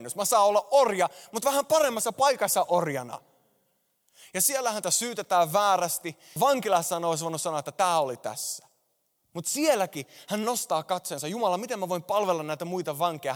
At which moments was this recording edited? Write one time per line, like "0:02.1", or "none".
0:06.4